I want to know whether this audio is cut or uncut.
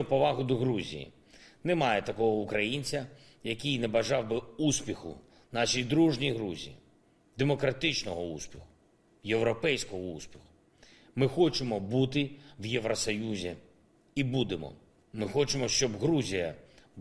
uncut